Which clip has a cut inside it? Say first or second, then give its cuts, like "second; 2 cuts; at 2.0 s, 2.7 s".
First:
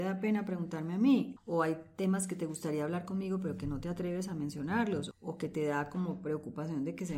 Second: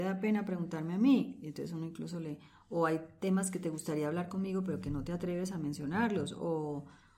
first; 2 cuts; at 1.4 s, 5.1 s